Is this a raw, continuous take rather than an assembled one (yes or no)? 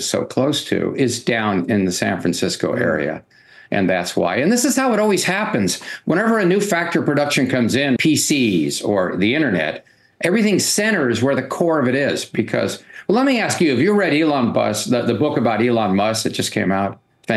no